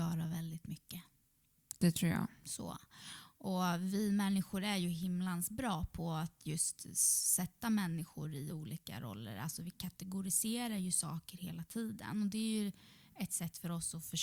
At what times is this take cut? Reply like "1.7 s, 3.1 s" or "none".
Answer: none